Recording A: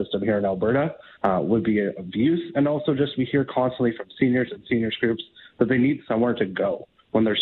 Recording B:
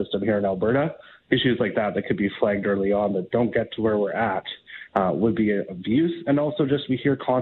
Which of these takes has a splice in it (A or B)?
A